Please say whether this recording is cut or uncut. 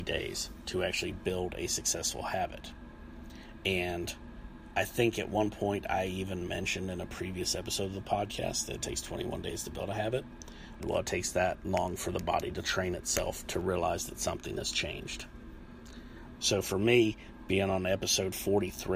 cut